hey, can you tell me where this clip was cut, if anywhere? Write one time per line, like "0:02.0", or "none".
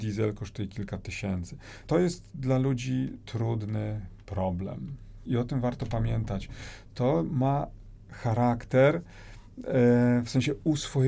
0:01.9
0:05.3